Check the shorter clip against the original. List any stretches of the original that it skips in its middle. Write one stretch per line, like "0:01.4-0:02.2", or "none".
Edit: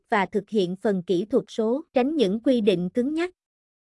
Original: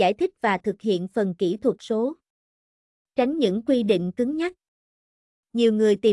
0:02.2-0:03.1